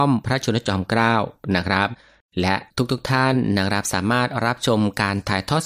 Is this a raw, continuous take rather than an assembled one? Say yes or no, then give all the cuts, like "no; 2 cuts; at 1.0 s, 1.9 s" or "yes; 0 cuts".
yes; 0 cuts